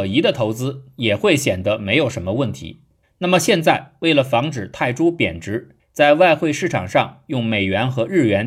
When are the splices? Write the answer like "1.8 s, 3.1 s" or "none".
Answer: 3.0 s, 5.8 s